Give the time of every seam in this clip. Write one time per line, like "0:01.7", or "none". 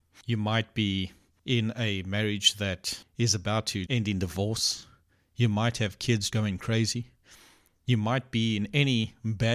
0:03.9
0:06.3